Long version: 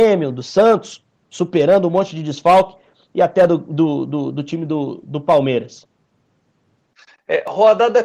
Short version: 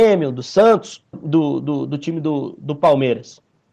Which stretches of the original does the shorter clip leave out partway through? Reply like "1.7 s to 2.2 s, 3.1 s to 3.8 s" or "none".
1.1 s to 3.6 s